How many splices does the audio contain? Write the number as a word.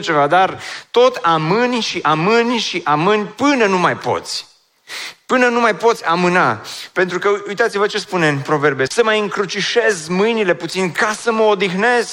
one